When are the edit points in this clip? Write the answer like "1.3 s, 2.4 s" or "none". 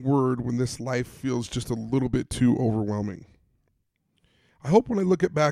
none